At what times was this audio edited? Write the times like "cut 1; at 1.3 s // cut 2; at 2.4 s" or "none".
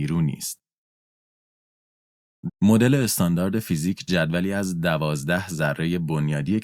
cut 1; at 2.5 s